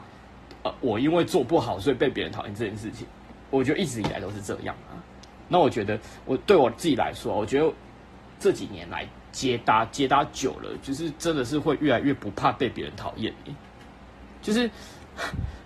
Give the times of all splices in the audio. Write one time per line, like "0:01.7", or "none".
0:05.4